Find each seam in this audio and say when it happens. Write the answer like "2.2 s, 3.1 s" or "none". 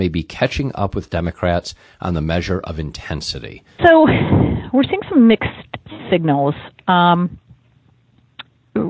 3.8 s